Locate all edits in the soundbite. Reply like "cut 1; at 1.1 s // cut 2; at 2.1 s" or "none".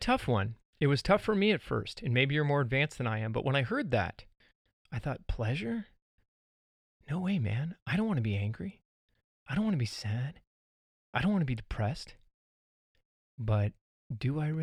none